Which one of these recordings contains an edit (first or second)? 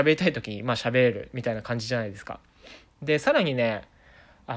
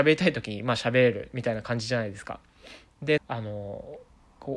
second